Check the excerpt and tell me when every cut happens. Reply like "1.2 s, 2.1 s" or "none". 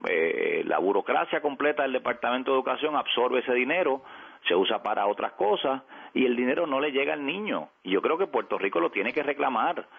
none